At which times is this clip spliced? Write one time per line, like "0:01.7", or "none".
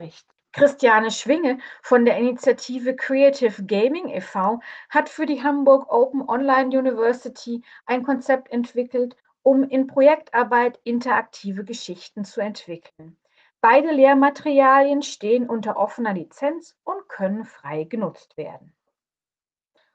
none